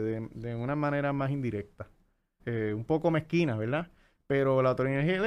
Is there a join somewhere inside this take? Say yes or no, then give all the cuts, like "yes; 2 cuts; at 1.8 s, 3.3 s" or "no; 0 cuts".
yes; 1 cut; at 2.4 s